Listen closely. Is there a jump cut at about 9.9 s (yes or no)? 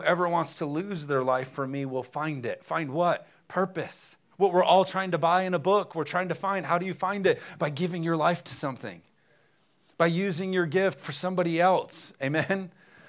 no